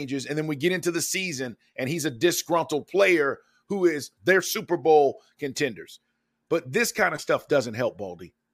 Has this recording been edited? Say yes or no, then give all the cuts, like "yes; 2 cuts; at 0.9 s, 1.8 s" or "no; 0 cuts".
yes; 1 cut; at 4.2 s